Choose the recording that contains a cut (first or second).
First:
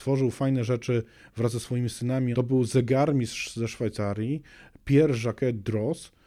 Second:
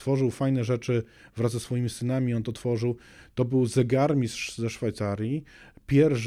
first